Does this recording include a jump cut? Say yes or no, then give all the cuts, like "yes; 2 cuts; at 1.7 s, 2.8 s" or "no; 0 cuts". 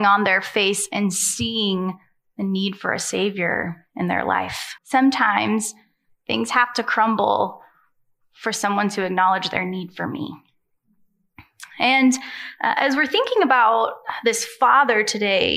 yes; 1 cut; at 4.8 s